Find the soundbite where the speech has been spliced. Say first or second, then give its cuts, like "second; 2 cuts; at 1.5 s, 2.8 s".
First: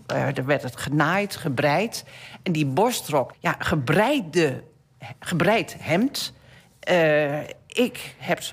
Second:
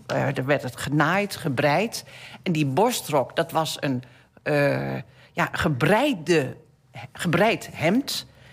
first; 1 cut; at 3.3 s